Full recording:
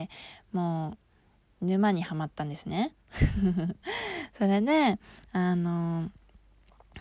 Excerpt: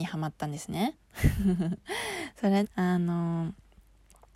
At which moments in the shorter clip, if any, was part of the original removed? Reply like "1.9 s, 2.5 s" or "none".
2.6 s